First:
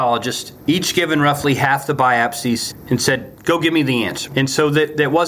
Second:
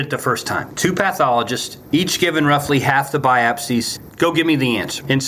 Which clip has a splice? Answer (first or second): second